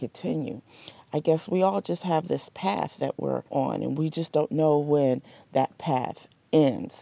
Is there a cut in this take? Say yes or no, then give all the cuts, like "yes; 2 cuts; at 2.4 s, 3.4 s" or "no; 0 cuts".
yes; 1 cut; at 3.5 s